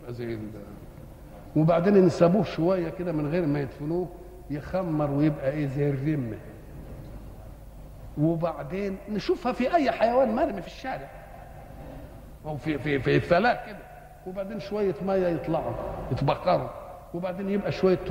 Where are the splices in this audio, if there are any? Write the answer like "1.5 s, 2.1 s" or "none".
none